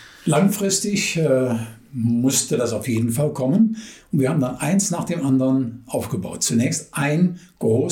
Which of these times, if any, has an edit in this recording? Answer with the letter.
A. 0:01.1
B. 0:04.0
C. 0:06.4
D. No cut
D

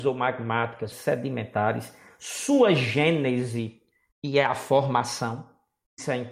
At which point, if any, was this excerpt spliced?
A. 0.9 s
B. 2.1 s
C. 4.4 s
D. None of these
A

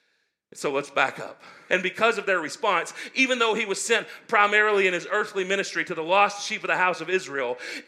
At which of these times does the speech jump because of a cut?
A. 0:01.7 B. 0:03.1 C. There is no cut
A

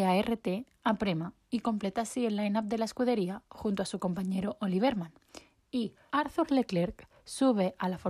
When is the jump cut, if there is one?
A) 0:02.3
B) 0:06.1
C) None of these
B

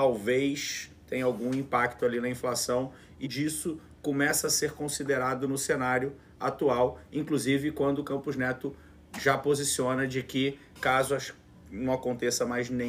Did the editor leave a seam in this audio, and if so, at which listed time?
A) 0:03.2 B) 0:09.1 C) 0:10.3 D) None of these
A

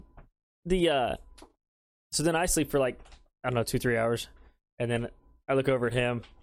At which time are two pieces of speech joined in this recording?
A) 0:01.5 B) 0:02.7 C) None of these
C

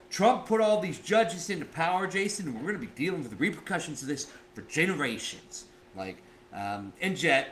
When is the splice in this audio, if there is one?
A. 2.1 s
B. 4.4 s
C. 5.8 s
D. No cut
C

